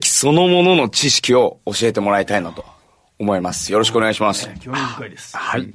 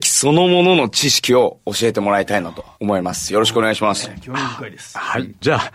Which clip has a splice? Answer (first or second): second